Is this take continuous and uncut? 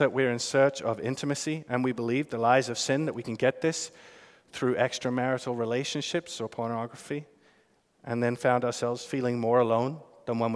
yes; 0 cuts

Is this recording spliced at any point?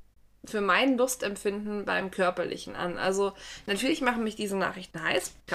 no; 0 cuts

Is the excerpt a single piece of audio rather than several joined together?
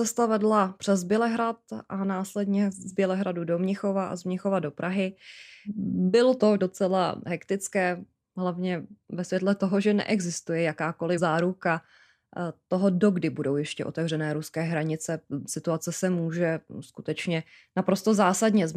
yes; 0 cuts

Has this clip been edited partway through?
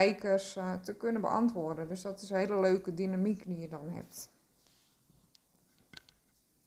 no; 0 cuts

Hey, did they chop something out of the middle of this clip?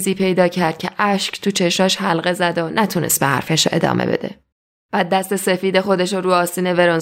no; 0 cuts

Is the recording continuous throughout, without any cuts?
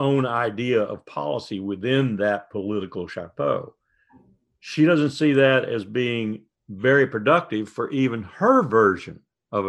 yes; 0 cuts

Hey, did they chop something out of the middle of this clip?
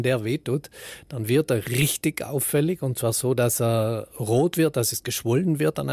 no; 0 cuts

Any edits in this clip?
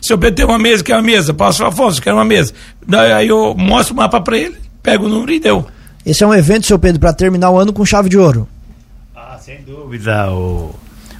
no; 0 cuts

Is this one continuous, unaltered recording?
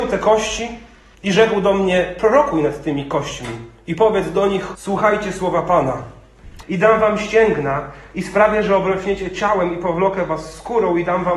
no; 3 cuts; at 1.1 s, 4.7 s, 6.6 s

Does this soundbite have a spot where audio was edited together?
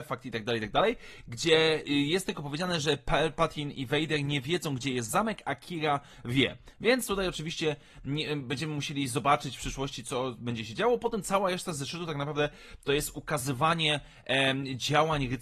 no; 0 cuts

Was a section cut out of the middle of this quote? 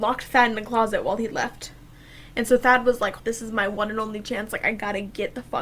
yes; 1 cut; at 3.2 s

